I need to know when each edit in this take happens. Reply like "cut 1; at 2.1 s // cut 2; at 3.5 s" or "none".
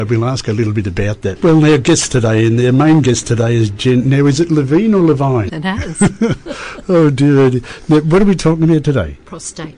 cut 1; at 1.4 s // cut 2; at 5.5 s